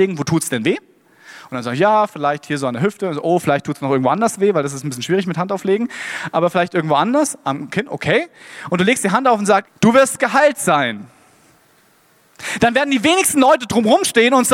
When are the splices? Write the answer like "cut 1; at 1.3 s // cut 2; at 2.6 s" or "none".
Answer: cut 1; at 9.6 s